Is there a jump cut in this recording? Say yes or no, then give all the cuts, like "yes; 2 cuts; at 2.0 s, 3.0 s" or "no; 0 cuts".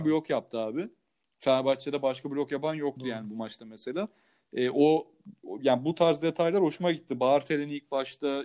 no; 0 cuts